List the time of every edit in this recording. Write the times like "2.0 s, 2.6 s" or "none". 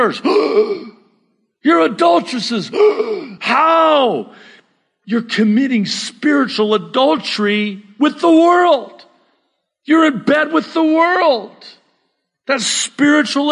none